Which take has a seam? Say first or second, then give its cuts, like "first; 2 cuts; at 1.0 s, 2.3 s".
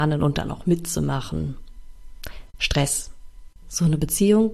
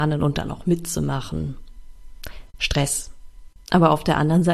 first; 1 cut; at 3.6 s